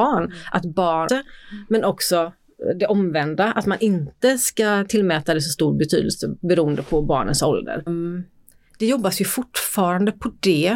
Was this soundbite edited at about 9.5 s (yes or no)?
no